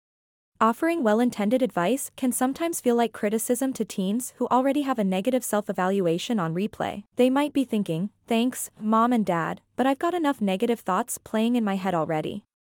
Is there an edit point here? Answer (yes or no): yes